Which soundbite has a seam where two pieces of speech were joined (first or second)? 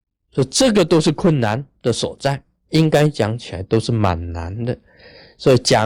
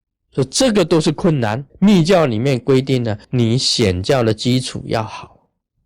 second